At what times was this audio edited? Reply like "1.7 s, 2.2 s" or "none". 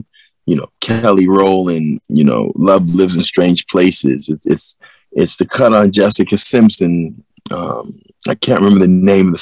2.0 s